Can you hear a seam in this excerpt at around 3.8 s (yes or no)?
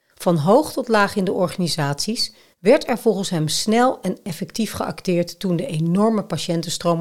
no